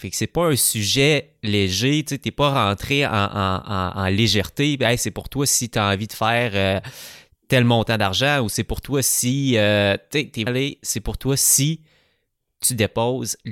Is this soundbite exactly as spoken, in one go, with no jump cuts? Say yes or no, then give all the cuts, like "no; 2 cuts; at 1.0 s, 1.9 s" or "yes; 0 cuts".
no; 1 cut; at 10.5 s